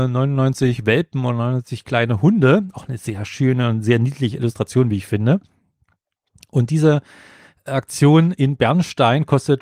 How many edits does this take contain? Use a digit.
0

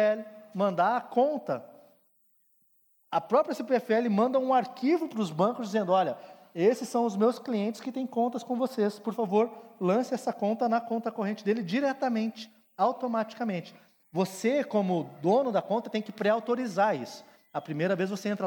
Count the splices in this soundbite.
0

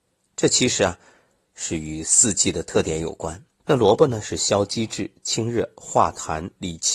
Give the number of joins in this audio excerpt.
1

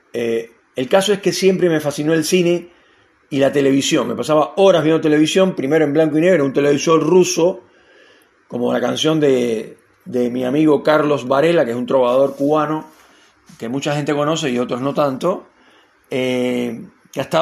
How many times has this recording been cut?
0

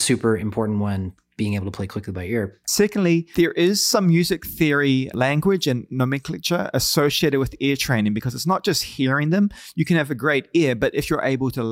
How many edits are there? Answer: 1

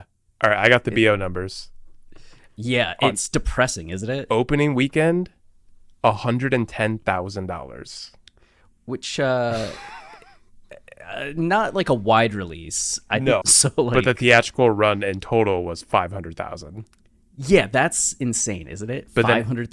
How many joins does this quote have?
1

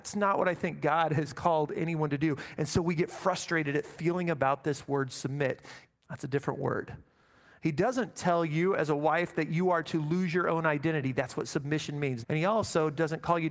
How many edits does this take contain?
2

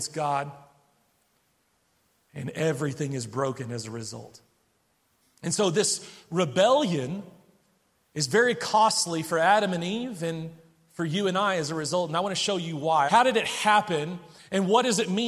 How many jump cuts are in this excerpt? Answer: 1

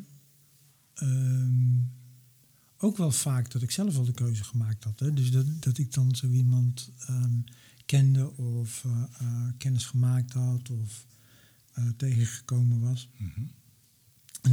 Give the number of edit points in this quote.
0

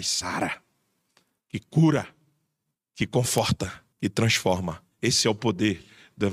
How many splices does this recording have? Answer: 2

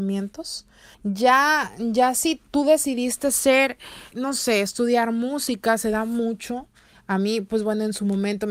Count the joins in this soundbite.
2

